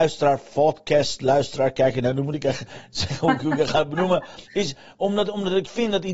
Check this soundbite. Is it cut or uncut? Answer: uncut